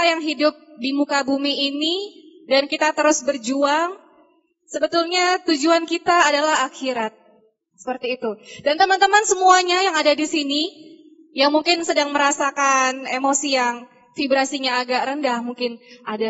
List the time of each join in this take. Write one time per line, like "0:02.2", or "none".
none